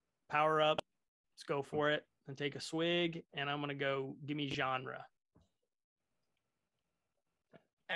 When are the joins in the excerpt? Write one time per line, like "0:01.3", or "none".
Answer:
none